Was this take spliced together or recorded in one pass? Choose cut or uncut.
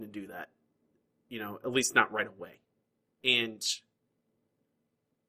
uncut